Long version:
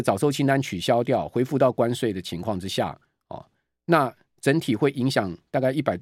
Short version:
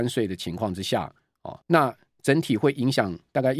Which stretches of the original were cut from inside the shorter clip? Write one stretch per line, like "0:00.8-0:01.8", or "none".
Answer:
0:03.5-0:03.8